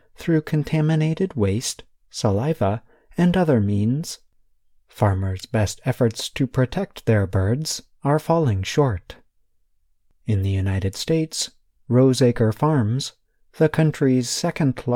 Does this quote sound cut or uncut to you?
uncut